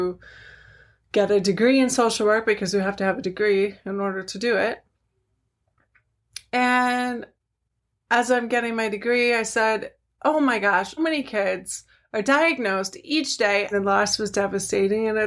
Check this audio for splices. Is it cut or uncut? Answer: cut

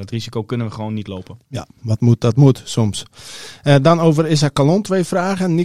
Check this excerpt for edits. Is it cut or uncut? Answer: uncut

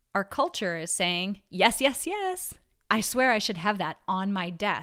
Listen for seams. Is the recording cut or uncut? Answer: cut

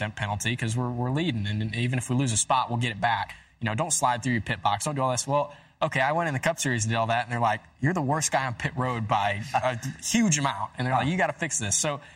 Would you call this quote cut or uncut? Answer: uncut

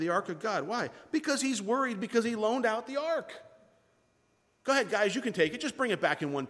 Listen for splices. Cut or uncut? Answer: uncut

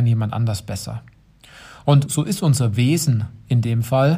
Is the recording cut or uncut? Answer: cut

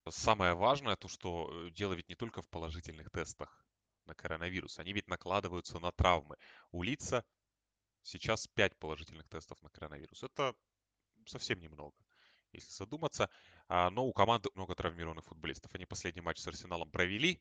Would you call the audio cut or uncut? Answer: cut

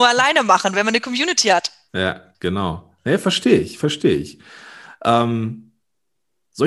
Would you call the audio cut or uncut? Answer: uncut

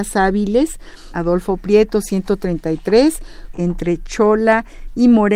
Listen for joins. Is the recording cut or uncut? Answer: cut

